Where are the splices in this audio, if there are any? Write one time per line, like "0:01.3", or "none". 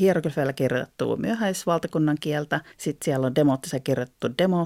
0:02.7